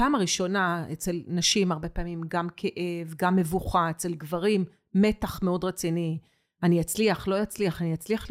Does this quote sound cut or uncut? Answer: uncut